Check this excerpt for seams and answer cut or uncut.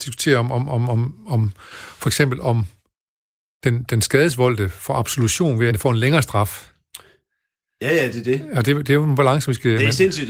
cut